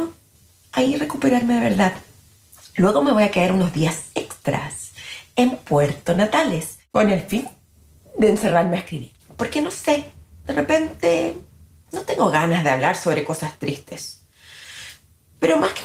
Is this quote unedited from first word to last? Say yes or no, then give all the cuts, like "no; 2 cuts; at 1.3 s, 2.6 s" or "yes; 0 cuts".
no; 1 cut; at 9.2 s